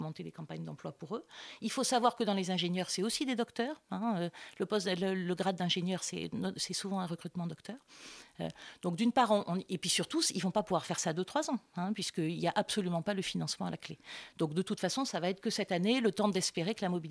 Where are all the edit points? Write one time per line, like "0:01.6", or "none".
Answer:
none